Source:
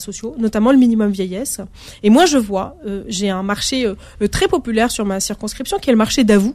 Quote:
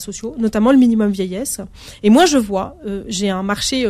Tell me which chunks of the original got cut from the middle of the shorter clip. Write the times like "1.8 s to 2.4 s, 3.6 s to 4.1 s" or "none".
none